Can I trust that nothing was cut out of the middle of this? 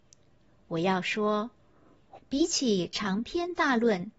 no; 1 cut; at 2.1 s

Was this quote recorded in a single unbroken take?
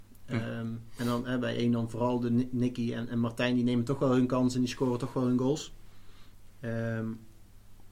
yes; 0 cuts

